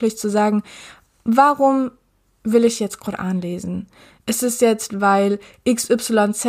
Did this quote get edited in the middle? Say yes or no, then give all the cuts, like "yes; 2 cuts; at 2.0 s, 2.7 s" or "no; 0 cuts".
no; 0 cuts